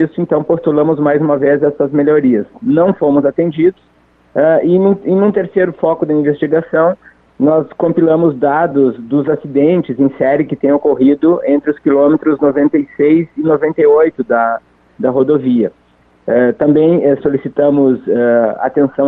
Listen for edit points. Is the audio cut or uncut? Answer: uncut